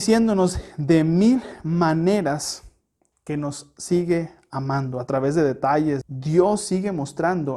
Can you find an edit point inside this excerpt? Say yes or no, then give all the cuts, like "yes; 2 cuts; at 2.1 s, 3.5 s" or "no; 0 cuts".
yes; 1 cut; at 6.0 s